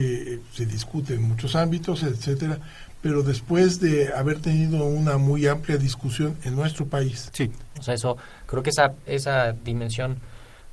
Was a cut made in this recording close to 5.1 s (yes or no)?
no